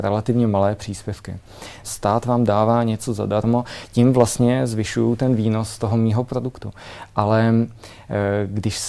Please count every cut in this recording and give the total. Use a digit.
1